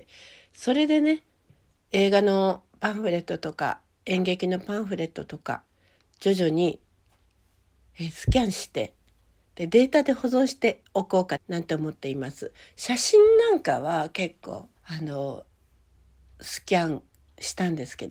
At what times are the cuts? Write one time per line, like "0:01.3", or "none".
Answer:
0:11.4
0:14.8